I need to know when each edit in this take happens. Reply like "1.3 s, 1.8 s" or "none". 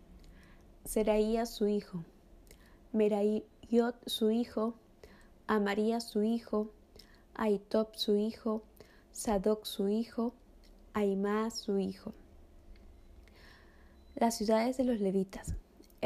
none